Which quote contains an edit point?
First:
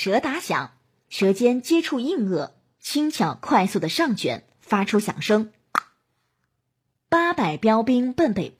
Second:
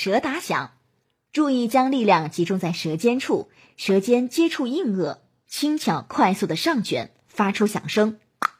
first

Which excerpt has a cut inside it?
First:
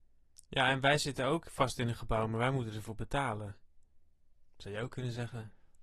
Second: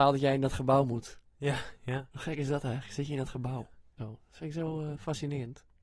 second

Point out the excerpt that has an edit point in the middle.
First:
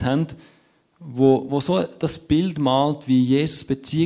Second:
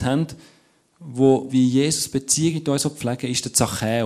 second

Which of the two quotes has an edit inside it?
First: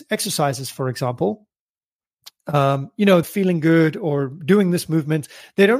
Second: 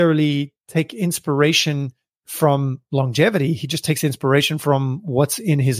first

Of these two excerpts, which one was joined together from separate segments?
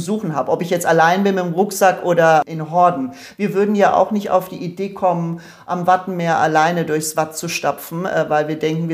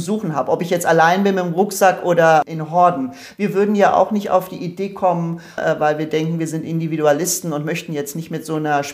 second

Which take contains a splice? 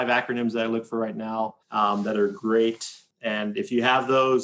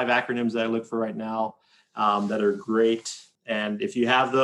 first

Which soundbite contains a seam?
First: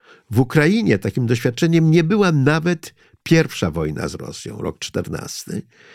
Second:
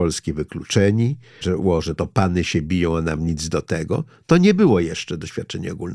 second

